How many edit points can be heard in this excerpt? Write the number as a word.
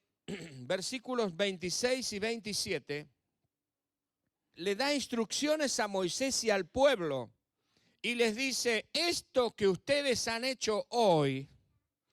one